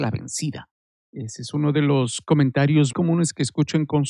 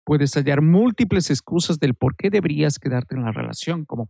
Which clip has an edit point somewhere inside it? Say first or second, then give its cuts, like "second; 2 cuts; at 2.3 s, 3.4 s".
first; 1 cut; at 2.9 s